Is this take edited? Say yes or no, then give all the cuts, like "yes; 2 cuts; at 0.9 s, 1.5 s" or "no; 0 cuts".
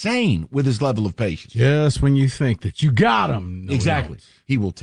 no; 0 cuts